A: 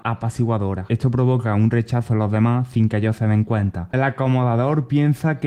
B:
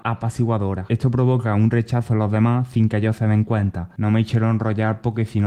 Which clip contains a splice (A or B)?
A